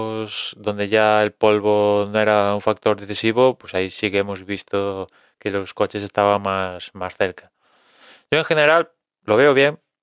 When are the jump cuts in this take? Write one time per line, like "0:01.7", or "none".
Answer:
none